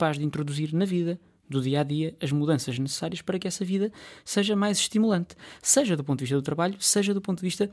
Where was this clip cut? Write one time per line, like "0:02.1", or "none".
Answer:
none